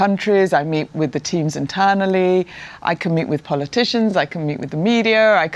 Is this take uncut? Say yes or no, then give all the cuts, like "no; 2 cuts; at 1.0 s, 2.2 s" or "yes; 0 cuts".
yes; 0 cuts